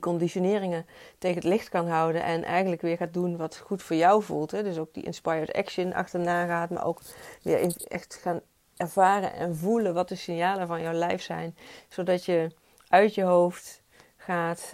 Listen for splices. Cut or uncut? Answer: uncut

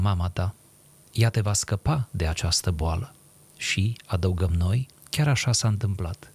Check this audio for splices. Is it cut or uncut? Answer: uncut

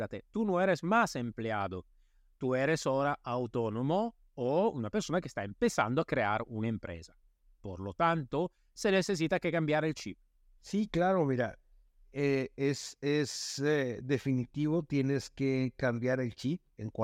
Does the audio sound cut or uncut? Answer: cut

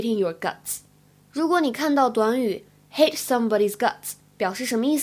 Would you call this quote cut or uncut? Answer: uncut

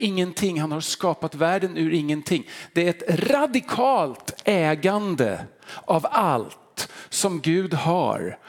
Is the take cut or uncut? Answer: uncut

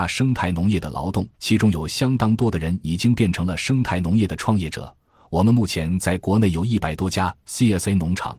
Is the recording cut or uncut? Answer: cut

